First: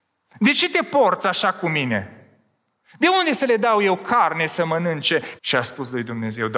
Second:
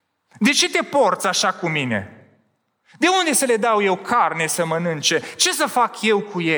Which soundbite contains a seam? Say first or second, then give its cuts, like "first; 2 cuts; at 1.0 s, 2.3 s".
first; 1 cut; at 5.4 s